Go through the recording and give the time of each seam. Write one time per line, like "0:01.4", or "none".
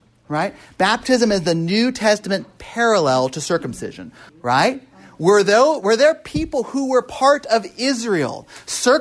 0:04.3

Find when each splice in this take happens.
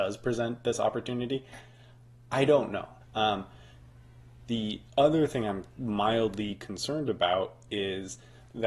0:03.0

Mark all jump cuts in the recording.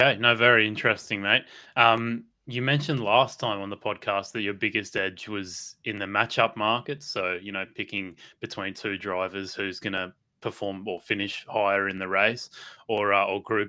none

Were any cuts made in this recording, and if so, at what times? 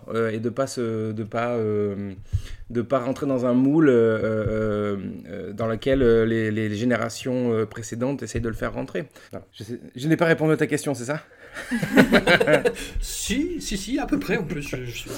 0:09.3

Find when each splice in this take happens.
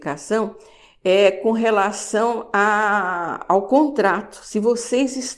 none

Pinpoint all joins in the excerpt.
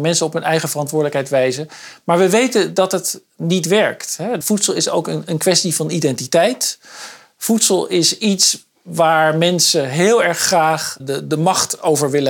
0:04.4
0:11.0

